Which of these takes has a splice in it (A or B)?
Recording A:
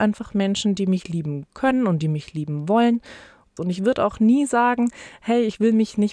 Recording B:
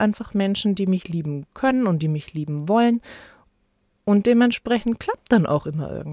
A